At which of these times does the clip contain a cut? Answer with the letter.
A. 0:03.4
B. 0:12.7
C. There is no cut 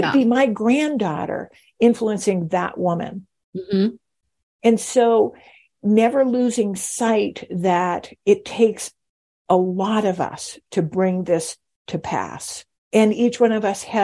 B